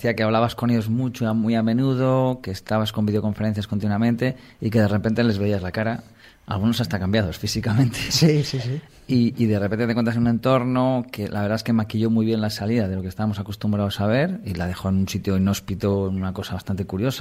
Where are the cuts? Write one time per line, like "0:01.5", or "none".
none